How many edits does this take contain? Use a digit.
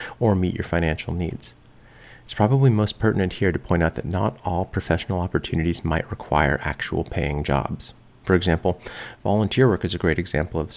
0